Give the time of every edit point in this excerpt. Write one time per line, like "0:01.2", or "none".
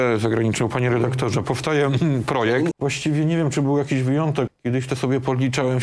0:02.7
0:04.5